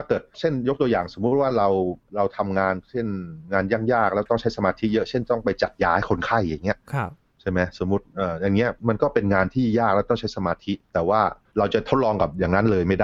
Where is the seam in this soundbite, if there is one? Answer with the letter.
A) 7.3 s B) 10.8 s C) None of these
B